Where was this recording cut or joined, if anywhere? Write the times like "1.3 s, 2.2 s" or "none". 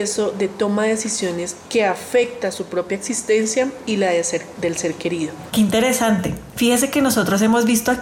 5.5 s